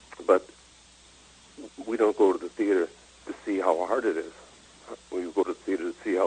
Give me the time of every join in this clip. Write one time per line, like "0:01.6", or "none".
none